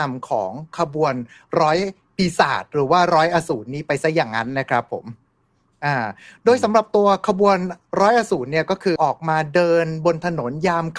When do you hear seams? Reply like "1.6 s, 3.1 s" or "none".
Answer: 9.0 s